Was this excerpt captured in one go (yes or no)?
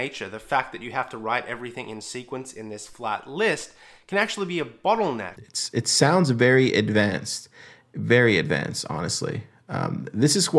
no